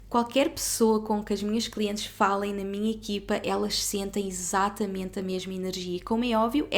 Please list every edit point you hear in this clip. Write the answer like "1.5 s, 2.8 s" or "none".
none

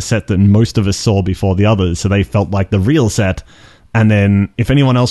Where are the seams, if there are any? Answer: none

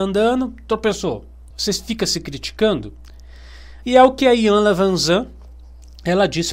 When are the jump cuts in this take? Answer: 1.5 s, 3.8 s

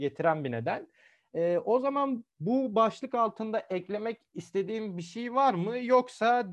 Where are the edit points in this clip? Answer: 2.3 s

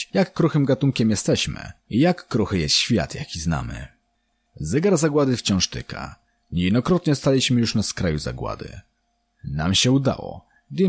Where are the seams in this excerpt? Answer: none

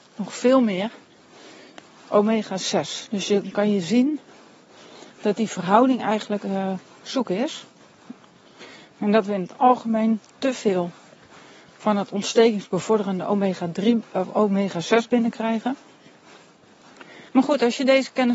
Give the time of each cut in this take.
5.1 s, 17.3 s

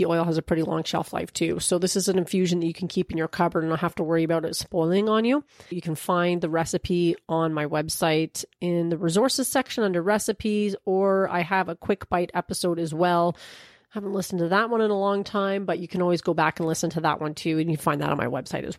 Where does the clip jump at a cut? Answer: 5.7 s

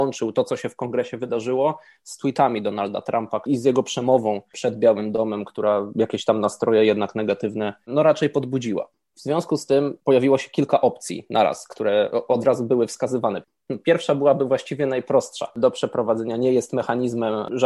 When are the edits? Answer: 3.5 s

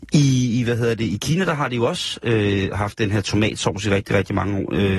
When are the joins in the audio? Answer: none

